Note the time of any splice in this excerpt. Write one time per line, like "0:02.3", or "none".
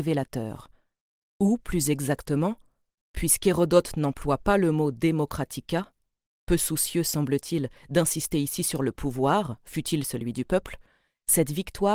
0:01.2